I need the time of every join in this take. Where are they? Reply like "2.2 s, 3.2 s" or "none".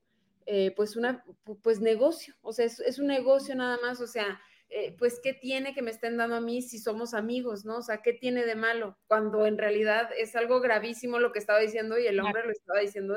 none